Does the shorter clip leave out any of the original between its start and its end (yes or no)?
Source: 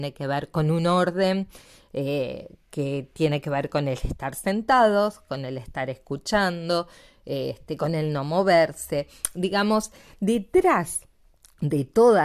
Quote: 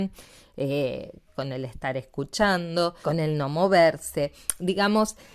yes